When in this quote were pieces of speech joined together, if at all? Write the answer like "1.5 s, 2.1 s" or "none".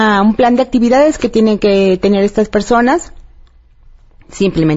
none